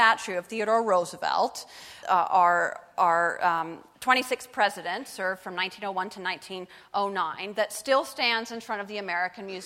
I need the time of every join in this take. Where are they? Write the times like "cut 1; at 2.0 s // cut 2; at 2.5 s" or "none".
cut 1; at 2.0 s